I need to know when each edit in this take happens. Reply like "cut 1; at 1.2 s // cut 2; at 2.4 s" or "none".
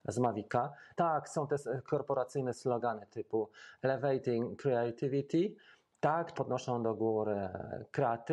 cut 1; at 0.9 s // cut 2; at 6.3 s

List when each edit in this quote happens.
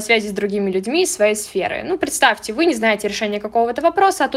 none

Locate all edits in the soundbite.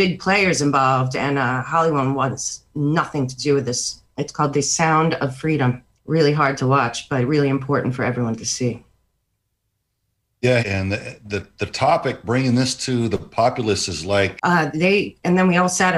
cut 1; at 6.0 s // cut 2; at 10.6 s // cut 3; at 14.4 s

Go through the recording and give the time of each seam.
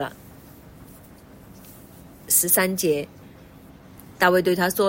cut 1; at 3.7 s

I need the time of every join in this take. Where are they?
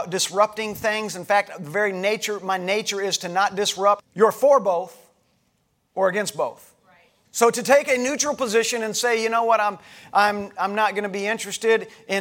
cut 1; at 4.0 s // cut 2; at 7.2 s

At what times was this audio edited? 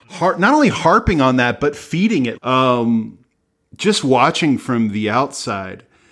cut 1; at 2.4 s

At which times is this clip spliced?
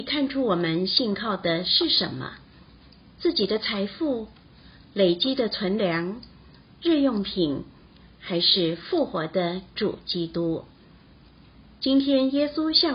none

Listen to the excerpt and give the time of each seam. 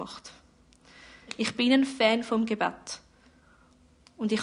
none

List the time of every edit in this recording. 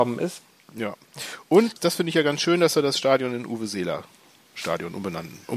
none

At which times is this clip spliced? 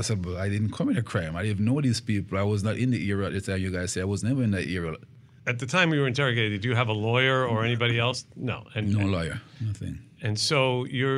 none

